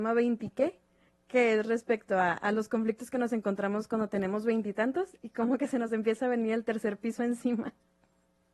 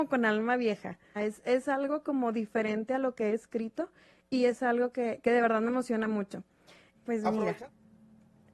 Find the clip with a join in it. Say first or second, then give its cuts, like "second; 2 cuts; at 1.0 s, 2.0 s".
second; 2 cuts; at 1.2 s, 6.9 s